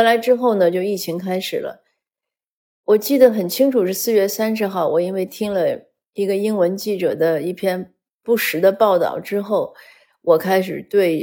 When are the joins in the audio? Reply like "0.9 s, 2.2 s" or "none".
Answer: none